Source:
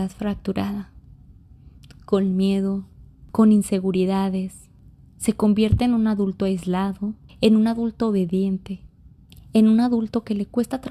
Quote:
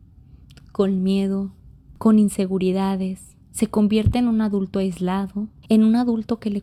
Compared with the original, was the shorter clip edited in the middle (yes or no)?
yes